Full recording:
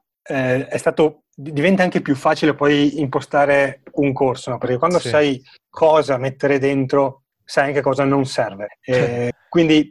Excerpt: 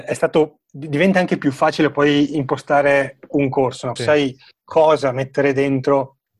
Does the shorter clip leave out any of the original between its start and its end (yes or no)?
yes